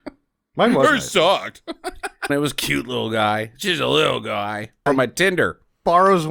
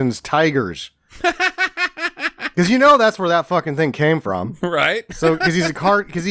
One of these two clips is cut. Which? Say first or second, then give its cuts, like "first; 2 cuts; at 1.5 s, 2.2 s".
first; 2 cuts; at 2.3 s, 4.9 s